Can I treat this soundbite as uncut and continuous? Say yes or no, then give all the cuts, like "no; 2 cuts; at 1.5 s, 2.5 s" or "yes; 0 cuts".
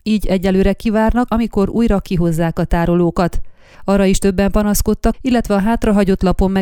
no; 3 cuts; at 1.3 s, 3.7 s, 5.1 s